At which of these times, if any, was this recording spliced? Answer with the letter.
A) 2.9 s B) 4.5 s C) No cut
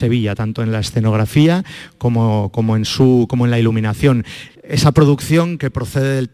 B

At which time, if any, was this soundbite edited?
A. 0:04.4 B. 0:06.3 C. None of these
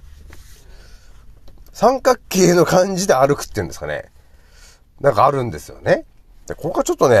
C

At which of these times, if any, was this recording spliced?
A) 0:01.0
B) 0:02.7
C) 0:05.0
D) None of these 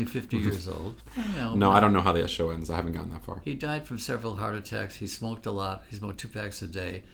A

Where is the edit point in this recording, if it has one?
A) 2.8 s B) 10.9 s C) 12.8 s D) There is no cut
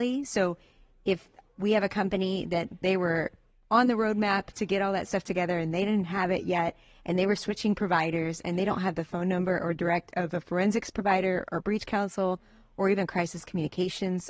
A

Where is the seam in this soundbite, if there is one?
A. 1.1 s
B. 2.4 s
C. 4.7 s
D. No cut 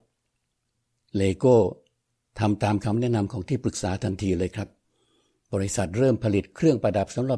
D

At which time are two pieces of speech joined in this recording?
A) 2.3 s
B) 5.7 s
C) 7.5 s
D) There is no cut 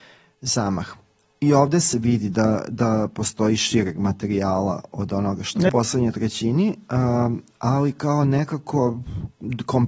B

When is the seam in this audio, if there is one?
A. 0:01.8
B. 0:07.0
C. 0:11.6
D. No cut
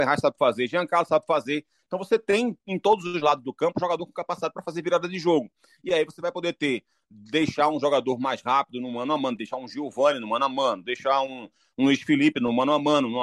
D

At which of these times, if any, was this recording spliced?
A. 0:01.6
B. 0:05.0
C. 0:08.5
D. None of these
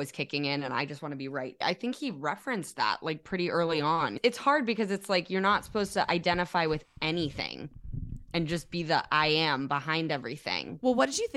A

